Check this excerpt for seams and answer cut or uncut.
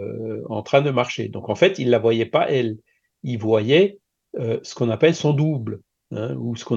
uncut